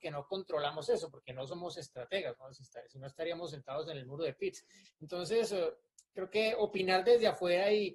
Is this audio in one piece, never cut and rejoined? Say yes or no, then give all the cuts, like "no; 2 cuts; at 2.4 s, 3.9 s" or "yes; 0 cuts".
no; 1 cut; at 4.8 s